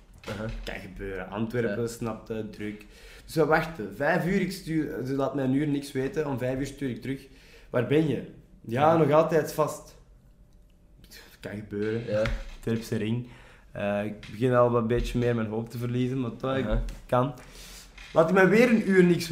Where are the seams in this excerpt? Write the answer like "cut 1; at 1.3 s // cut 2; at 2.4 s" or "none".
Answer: none